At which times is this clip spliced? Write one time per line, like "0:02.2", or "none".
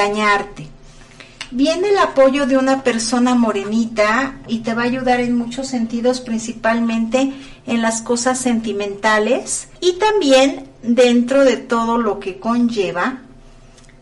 0:04.5
0:09.8